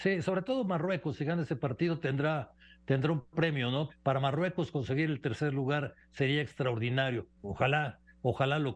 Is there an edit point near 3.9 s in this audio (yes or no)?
yes